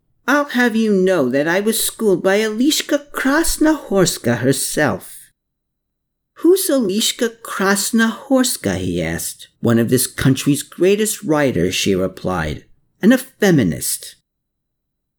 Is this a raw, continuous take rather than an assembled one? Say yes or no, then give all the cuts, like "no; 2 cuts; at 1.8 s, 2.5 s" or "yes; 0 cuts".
no; 1 cut; at 9.5 s